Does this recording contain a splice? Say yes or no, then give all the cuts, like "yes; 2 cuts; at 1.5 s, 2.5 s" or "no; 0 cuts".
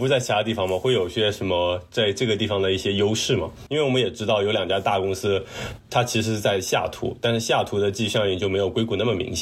yes; 2 cuts; at 3.7 s, 5.8 s